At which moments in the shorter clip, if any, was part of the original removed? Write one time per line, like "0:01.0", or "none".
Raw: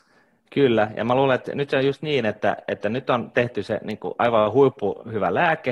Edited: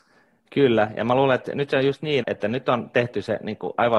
0:02.2